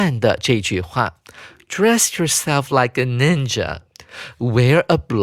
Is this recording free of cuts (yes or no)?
yes